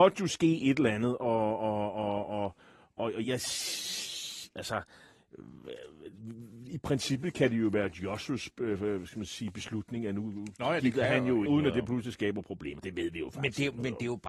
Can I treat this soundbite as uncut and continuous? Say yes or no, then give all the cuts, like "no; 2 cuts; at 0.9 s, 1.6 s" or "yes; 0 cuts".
no; 2 cuts; at 3.2 s, 11.5 s